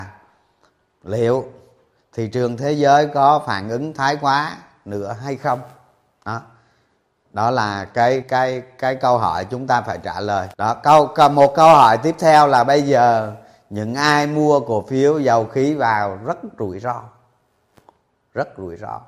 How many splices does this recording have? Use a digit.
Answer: 2